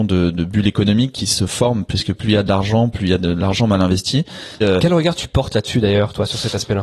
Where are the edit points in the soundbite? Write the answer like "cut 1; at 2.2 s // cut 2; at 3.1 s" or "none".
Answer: cut 1; at 4.6 s